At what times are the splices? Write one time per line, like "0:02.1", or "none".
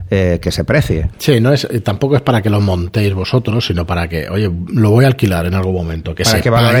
0:01.1